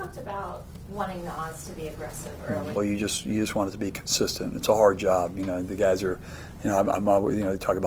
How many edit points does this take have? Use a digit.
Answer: 1